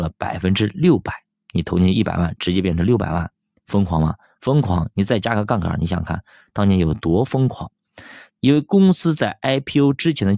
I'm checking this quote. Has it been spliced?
yes; 1 cut; at 8.3 s

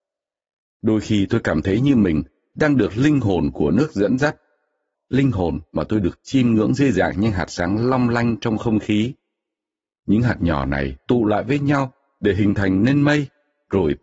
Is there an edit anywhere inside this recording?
yes; 1 cut; at 4.9 s

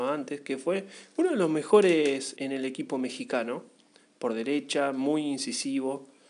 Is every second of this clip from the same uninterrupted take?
no; 1 cut; at 2.4 s

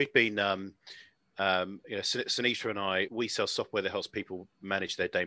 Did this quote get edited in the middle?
yes; 1 cut; at 3.1 s

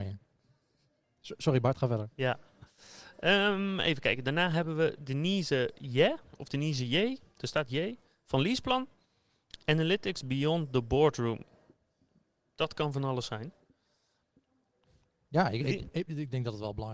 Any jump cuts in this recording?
no; 0 cuts

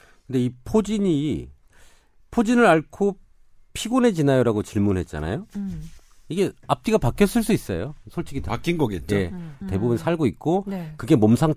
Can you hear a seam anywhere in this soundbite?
yes; 1 cut; at 9.6 s

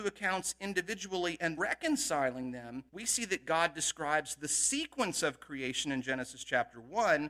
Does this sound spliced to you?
yes; 2 cuts; at 1.6 s, 2.9 s

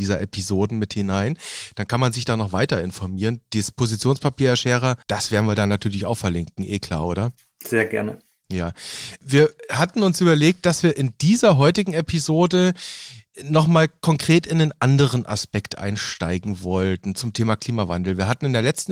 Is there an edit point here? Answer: yes; 1 cut; at 5.0 s

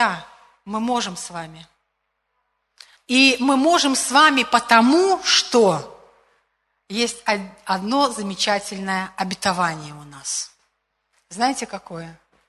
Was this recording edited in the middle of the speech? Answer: yes; 1 cut; at 3.0 s

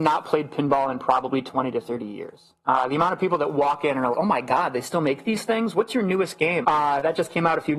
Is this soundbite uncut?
no; 2 cuts; at 4.1 s, 6.6 s

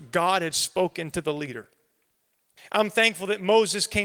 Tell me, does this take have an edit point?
yes; 1 cut; at 2.6 s

